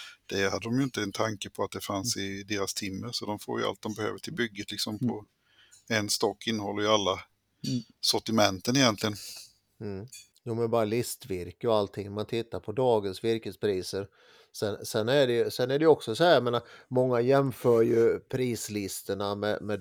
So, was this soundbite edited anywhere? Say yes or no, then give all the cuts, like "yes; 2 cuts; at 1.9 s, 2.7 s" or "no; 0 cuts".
no; 0 cuts